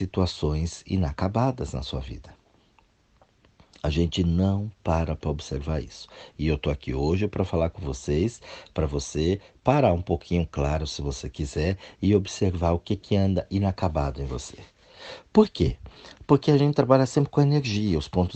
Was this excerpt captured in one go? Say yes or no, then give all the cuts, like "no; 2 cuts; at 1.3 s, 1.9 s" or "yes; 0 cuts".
yes; 0 cuts